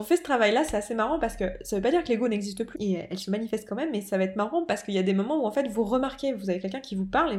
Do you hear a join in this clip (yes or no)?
yes